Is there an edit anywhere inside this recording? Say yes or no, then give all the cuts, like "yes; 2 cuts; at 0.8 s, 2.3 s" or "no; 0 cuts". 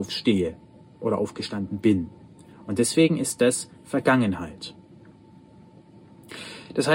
no; 0 cuts